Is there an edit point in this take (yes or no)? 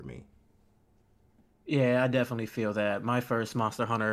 no